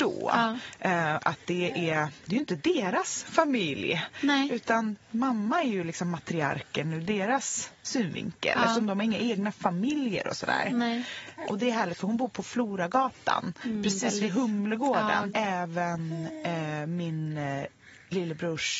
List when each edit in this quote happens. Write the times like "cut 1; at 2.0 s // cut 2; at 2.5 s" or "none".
cut 1; at 11.4 s // cut 2; at 15.3 s